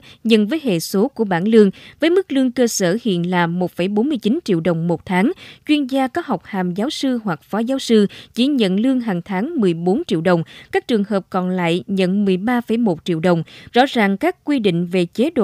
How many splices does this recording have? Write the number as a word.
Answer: one